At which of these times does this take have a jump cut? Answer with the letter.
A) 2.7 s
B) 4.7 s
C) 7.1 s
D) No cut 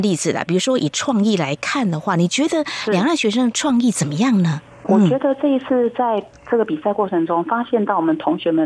B